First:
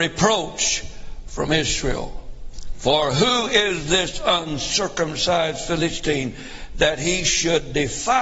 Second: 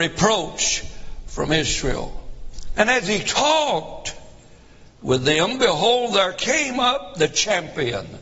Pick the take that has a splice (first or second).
second